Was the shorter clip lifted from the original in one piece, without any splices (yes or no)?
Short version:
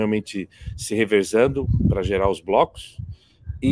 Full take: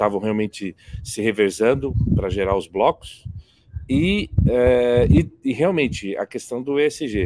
yes